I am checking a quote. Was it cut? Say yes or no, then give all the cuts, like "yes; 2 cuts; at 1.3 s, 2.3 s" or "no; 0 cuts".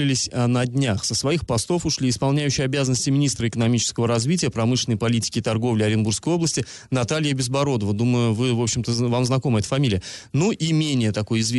no; 0 cuts